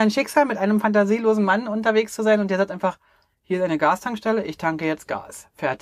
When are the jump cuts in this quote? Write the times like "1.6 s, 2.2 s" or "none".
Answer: none